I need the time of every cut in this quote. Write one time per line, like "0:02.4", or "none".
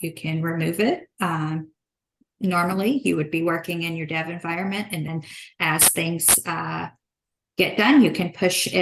none